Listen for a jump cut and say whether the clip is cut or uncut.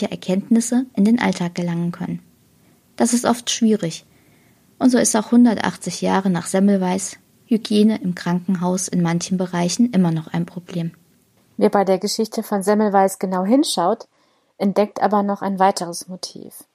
uncut